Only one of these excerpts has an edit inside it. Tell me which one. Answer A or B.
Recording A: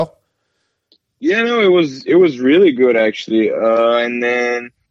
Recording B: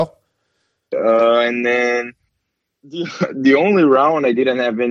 B